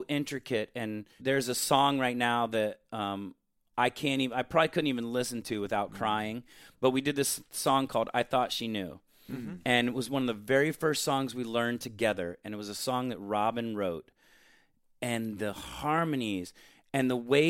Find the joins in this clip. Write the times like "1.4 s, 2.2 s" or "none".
none